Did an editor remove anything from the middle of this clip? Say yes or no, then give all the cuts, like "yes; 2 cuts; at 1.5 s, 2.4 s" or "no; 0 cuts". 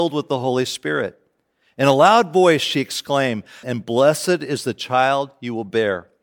yes; 1 cut; at 3.6 s